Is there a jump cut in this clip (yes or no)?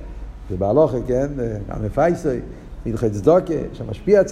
no